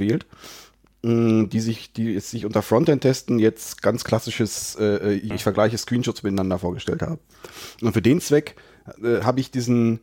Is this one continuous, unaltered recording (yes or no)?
no